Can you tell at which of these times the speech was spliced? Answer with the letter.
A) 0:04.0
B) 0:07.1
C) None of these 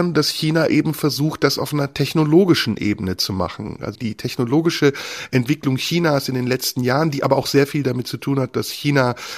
A